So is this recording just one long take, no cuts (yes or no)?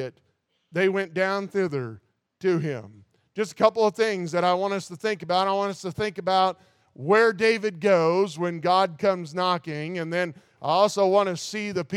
yes